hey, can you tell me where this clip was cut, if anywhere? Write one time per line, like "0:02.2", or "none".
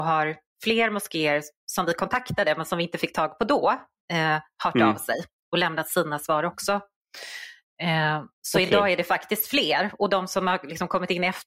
none